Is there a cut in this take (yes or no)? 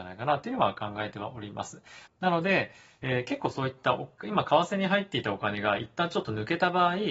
yes